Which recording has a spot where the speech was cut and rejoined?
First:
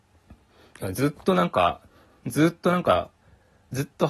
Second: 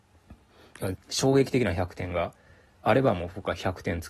second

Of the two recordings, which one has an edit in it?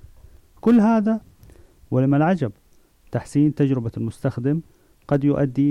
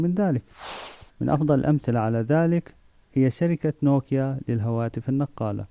second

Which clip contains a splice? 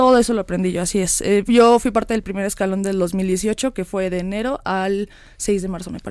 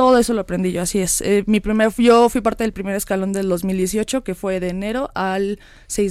first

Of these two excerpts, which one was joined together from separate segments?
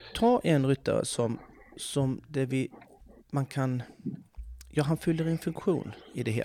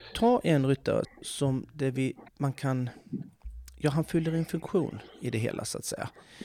second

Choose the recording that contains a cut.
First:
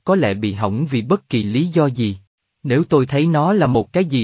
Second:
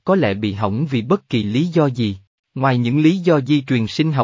second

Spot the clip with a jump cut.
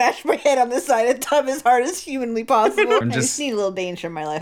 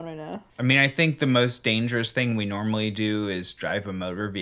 first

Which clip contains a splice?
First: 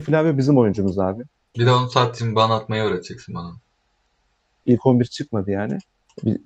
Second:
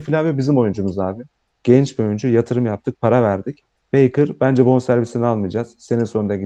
first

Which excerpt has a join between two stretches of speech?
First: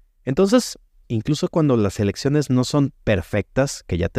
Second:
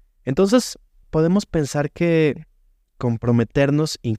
first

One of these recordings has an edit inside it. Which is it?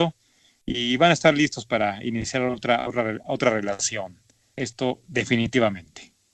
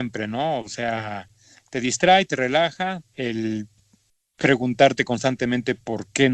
second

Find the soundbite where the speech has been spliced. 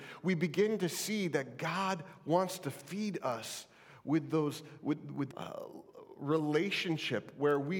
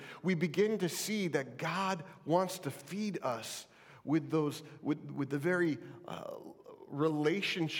first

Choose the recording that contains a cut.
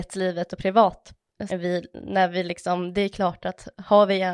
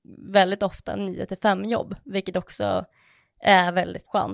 first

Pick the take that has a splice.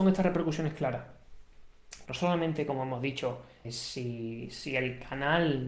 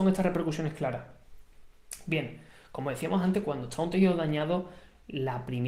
first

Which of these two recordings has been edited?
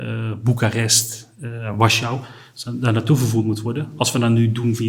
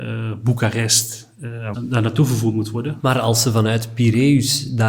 second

